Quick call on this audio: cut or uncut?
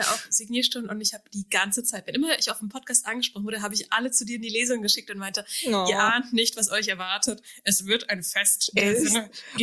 uncut